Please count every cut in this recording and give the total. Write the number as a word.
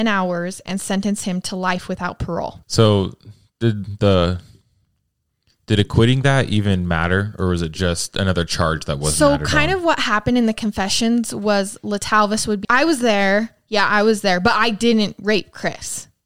two